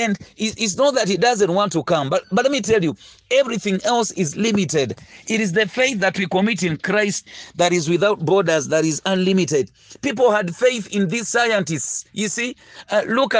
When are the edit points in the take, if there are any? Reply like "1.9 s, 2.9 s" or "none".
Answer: none